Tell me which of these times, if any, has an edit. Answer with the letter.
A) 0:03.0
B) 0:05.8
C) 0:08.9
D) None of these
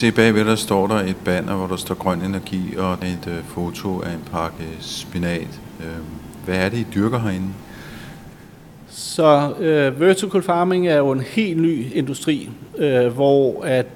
A